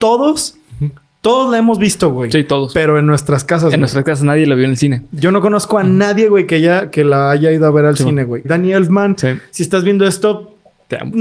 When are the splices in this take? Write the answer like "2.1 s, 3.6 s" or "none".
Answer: 8.4 s